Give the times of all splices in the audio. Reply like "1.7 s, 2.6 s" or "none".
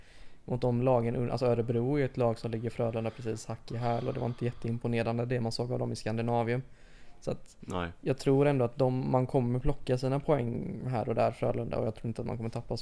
none